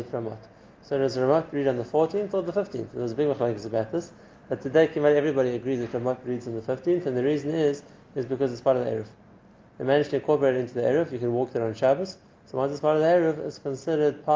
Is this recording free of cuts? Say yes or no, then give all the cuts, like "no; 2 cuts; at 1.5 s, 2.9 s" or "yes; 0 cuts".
yes; 0 cuts